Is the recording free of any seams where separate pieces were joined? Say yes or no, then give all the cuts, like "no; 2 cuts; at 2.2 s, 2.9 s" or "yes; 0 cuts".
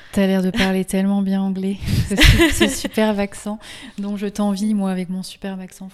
no; 1 cut; at 2.1 s